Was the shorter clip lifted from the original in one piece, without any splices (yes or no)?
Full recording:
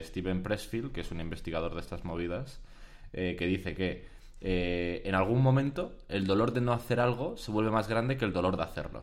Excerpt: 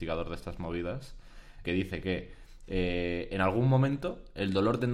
no